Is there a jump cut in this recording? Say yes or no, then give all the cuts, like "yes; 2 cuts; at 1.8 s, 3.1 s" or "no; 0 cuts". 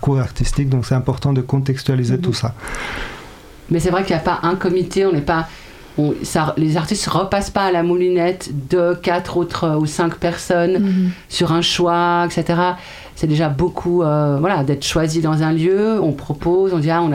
no; 0 cuts